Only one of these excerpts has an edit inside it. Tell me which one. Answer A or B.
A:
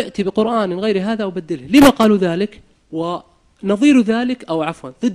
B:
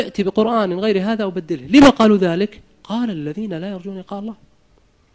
A